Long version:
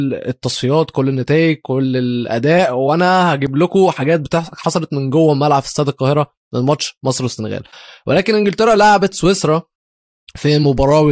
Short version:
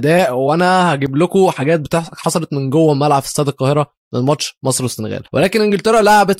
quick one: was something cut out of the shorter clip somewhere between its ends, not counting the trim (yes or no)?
yes